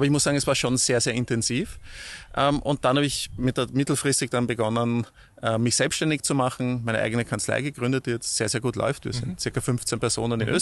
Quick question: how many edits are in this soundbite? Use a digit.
0